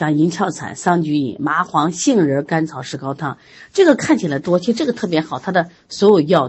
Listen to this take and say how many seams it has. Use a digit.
0